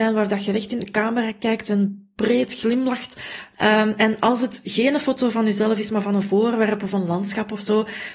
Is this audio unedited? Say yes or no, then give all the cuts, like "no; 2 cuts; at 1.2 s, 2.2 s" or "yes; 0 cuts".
no; 1 cut; at 3.5 s